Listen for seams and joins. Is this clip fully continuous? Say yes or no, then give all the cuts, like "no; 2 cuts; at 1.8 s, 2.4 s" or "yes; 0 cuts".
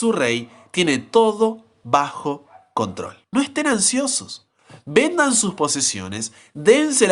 no; 1 cut; at 3.2 s